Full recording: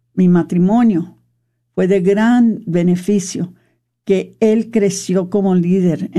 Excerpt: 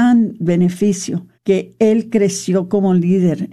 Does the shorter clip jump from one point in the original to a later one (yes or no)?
yes